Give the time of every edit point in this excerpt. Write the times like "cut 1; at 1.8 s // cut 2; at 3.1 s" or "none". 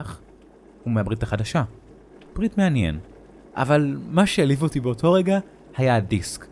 cut 1; at 2.1 s